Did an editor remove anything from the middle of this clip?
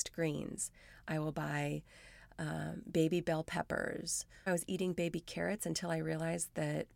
yes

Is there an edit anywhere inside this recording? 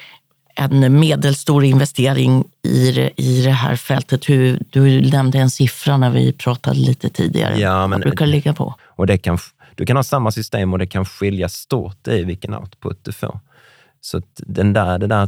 yes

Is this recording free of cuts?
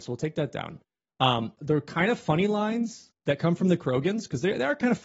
no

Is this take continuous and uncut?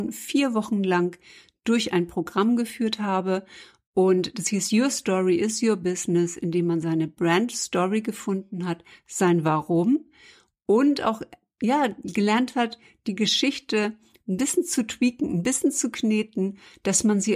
yes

